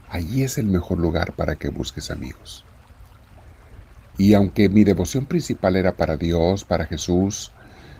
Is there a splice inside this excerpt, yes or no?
yes